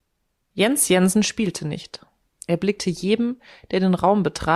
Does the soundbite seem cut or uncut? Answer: cut